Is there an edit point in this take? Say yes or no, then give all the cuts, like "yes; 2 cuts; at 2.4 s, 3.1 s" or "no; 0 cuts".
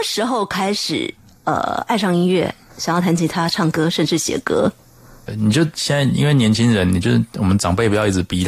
yes; 1 cut; at 5.3 s